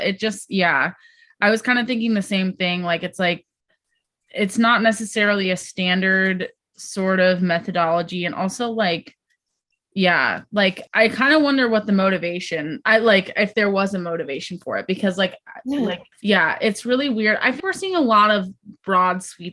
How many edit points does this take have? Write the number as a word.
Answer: three